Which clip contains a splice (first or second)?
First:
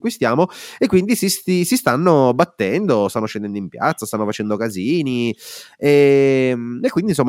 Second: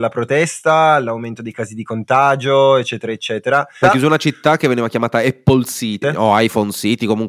second